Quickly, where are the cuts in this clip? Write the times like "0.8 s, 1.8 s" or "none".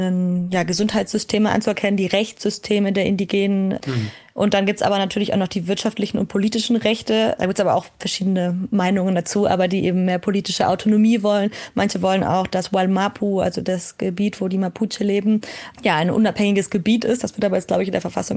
7.4 s